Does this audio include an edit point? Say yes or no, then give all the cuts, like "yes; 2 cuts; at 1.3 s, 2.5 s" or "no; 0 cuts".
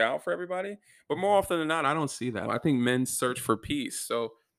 yes; 1 cut; at 2.5 s